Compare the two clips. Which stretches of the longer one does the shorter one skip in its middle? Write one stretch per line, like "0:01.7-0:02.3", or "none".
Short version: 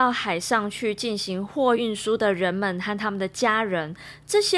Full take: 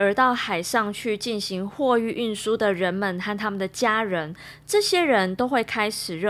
0:02.0-0:02.1